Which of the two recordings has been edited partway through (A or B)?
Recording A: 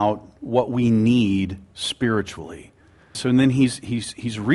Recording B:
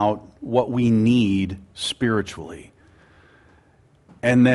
A